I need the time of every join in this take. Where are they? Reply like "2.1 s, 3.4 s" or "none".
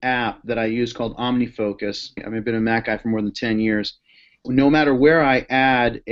2.2 s, 4.4 s